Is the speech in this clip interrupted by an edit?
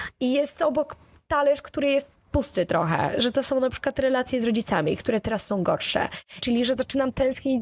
yes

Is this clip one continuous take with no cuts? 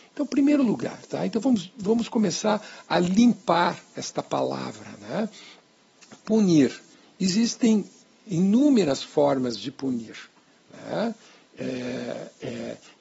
yes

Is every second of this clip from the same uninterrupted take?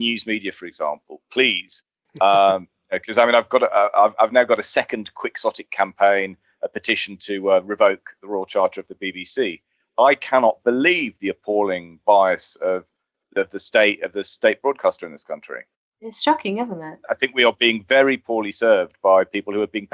yes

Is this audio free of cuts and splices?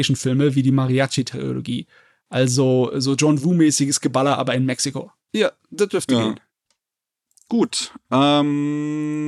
no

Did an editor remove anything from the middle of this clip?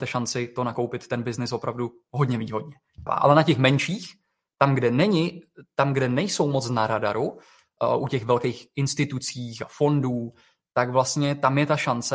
yes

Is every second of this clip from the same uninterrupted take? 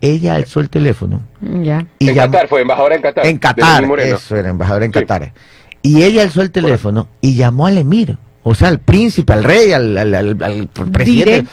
yes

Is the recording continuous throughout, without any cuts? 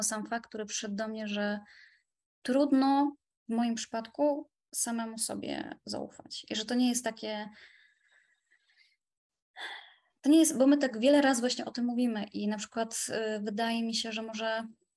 yes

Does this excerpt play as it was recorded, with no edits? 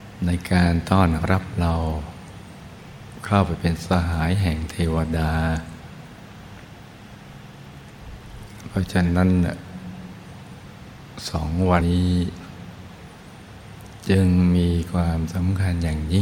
no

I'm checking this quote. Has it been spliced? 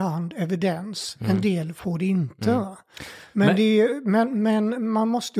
no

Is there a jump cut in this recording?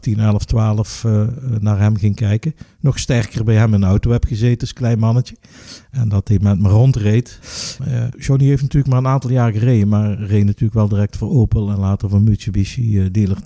yes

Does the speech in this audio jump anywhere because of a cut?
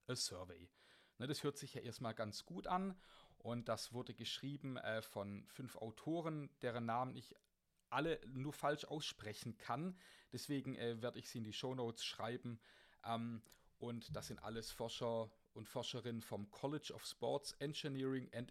no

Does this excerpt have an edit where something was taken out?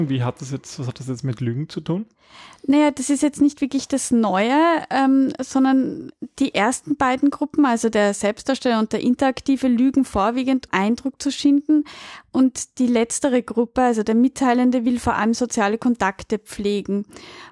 yes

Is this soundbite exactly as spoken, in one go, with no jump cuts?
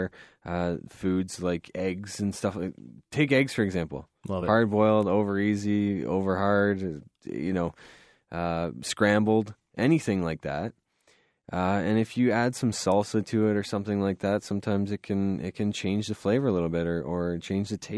yes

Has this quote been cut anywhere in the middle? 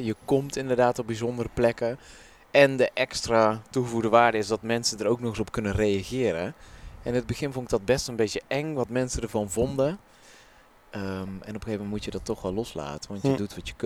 no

